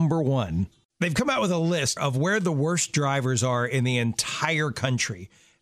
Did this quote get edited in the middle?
yes; 1 cut; at 2.0 s

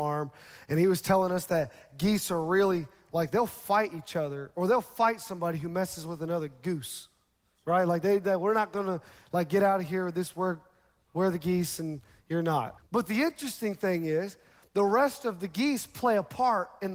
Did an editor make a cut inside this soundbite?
yes; 1 cut; at 12.8 s

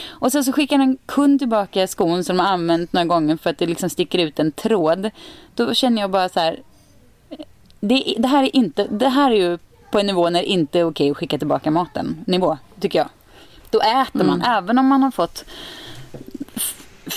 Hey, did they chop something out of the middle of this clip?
no; 0 cuts

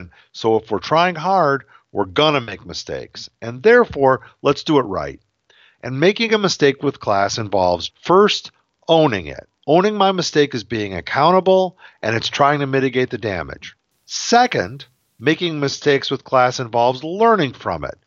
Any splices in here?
yes; 2 cuts; at 7.9 s, 9.6 s

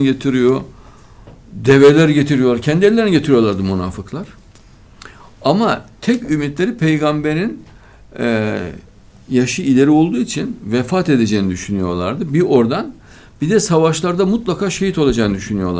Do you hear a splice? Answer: no; 0 cuts

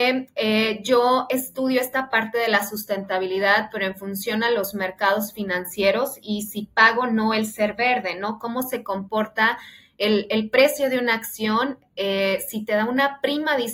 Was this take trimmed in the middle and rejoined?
no; 0 cuts

